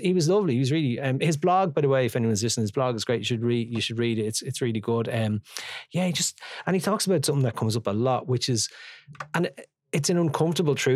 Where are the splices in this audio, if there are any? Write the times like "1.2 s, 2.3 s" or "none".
none